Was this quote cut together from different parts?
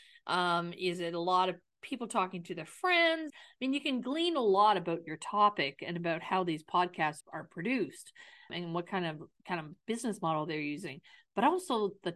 yes; 2 cuts; at 3.3 s, 7.2 s

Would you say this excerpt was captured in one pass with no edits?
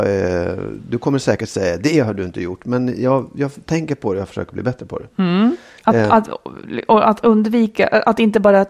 yes; 0 cuts

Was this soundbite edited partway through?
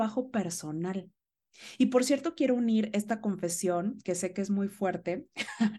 no; 0 cuts

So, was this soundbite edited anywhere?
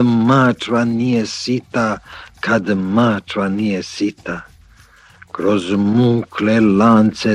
no; 0 cuts

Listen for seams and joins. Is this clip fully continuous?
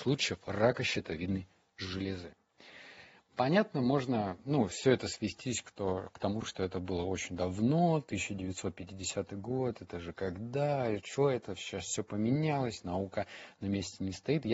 yes; 0 cuts

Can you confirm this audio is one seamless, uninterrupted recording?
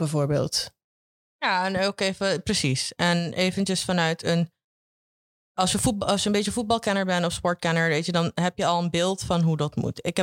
yes; 0 cuts

